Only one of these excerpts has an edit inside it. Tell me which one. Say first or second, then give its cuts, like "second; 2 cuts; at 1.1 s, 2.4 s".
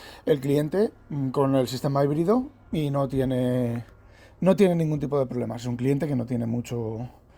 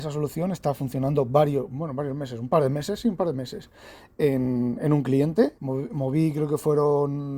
second; 1 cut; at 5.6 s